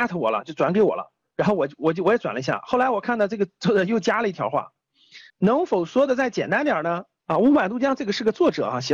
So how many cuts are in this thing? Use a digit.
2